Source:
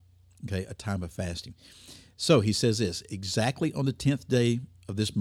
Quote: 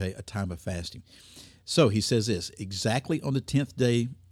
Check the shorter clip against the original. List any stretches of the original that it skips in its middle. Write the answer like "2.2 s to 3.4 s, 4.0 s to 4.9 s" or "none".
none